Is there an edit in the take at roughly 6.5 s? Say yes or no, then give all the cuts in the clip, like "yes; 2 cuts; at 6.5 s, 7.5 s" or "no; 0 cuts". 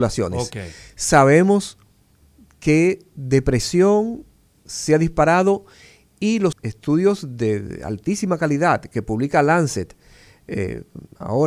yes; 1 cut; at 6.5 s